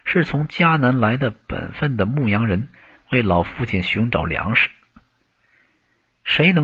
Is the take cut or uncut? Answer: uncut